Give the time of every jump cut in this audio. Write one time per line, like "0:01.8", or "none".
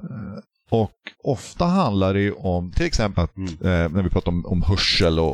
0:03.1

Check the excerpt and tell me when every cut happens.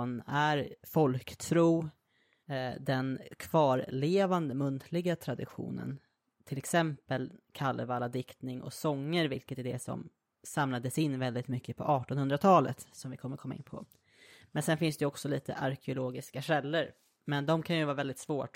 none

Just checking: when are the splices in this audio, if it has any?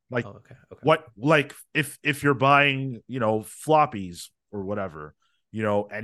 none

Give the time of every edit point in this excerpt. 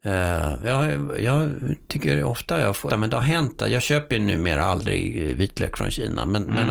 0:02.9

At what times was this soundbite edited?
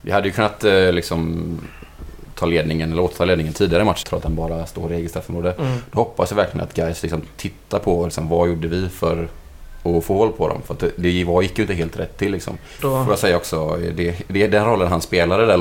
0:04.0
0:12.8

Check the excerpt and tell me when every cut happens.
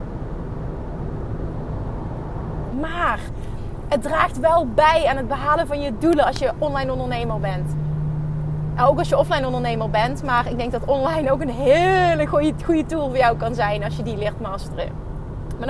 0:02.7

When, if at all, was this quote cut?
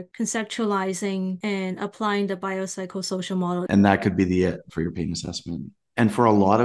0:03.7

